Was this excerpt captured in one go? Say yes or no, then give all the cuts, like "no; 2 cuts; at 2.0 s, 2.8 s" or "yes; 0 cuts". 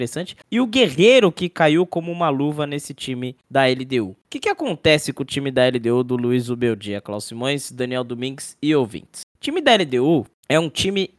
yes; 0 cuts